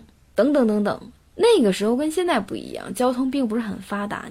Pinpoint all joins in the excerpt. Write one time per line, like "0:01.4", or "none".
none